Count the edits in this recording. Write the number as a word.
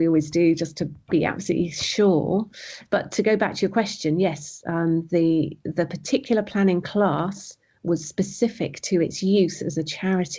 one